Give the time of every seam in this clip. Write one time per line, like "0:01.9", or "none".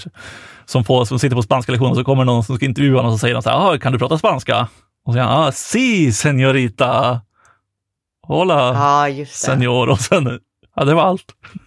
none